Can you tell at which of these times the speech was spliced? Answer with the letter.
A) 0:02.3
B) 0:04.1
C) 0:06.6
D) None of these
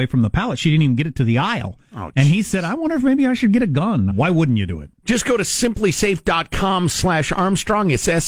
B